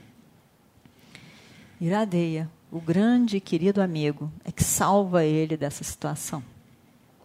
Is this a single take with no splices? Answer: yes; 0 cuts

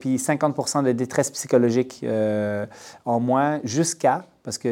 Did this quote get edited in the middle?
no; 0 cuts

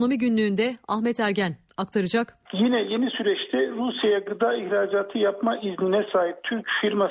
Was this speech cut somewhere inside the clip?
yes; 1 cut; at 2.5 s

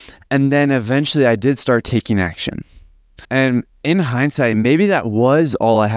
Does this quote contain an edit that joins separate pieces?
yes; 1 cut; at 3.2 s

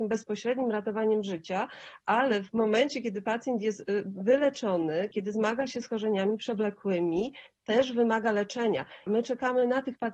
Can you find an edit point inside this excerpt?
yes; 2 cuts; at 5.1 s, 9.1 s

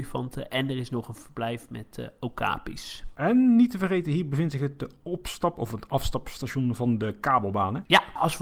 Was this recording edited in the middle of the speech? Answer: no; 0 cuts

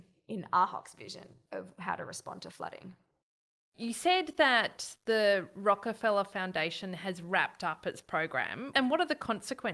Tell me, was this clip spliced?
yes; 1 cut; at 8.7 s

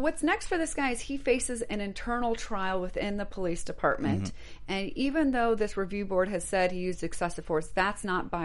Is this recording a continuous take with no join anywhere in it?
yes; 0 cuts

